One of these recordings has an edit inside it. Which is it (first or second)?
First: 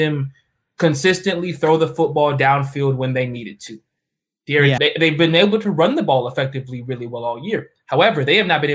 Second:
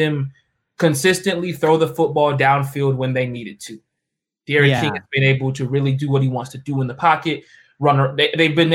first